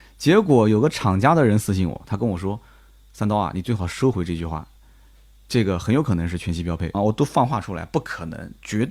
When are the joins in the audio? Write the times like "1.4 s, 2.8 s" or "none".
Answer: 6.9 s